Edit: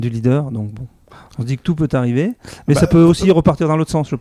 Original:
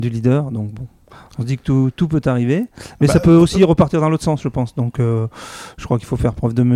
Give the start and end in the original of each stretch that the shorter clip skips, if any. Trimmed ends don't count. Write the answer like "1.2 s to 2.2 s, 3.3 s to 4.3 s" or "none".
1.6 s to 1.9 s